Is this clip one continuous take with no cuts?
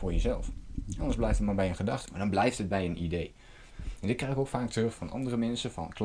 no; 3 cuts; at 2.1 s, 3.7 s, 5.0 s

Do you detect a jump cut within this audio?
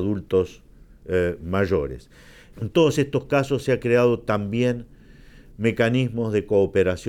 yes; 2 cuts; at 2.5 s, 5.5 s

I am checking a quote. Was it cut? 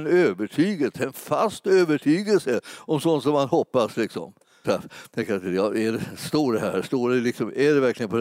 yes; 1 cut; at 4.6 s

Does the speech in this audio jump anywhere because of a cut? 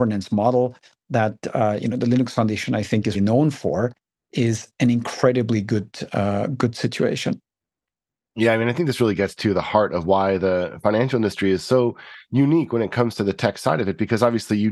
yes; 1 cut; at 3.1 s

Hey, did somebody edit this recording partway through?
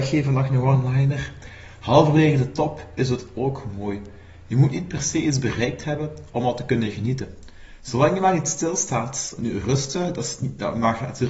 yes; 1 cut; at 9.4 s

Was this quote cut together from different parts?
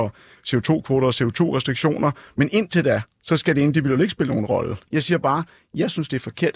yes; 1 cut; at 4.9 s

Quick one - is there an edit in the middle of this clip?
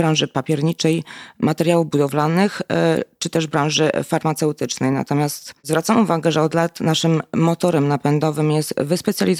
no; 0 cuts

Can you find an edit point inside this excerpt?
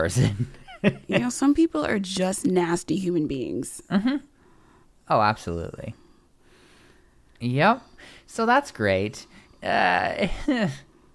no; 0 cuts

